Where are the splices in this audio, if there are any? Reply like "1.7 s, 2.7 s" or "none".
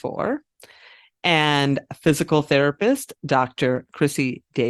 none